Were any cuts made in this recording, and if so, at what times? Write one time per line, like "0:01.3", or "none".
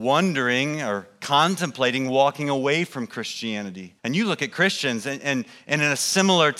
0:04.0